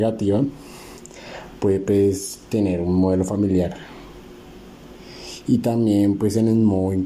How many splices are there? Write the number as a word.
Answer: zero